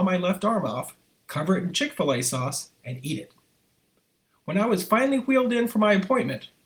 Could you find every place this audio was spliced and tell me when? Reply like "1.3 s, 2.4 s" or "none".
none